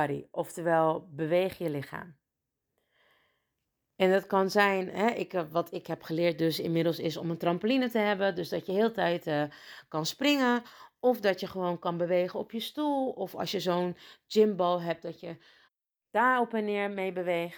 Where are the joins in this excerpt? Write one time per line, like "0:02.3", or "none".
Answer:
none